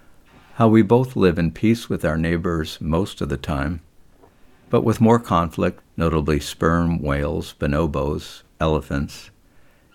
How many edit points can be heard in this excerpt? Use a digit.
1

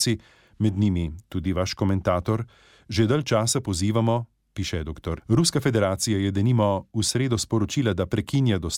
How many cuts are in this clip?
1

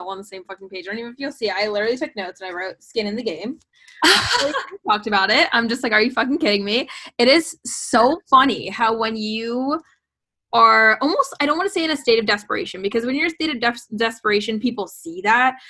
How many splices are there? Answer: 0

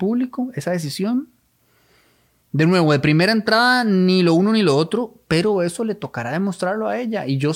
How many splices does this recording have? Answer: 0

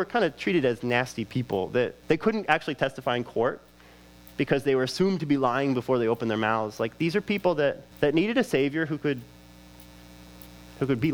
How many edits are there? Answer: 2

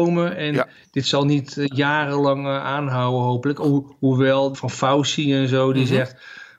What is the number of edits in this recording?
1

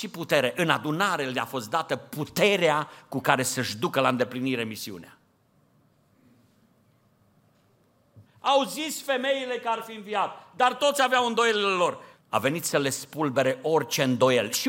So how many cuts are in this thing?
2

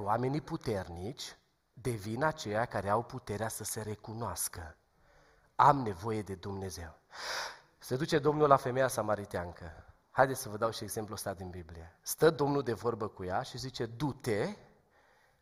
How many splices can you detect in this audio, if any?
0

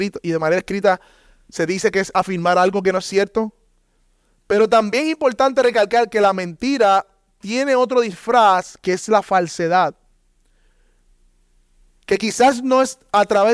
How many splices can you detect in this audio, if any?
0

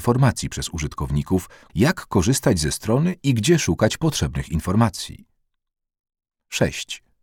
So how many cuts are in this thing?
1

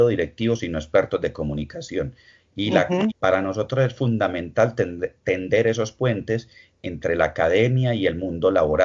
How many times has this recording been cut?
1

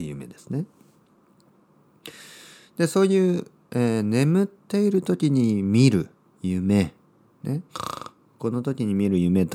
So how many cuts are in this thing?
0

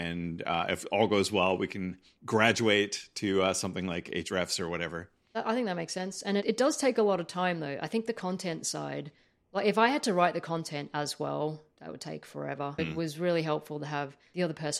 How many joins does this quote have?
1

